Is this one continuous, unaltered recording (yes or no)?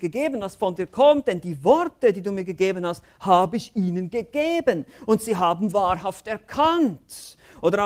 yes